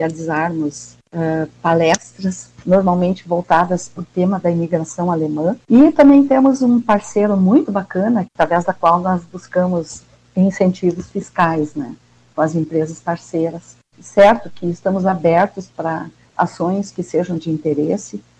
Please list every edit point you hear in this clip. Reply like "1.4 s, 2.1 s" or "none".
8.3 s, 13.9 s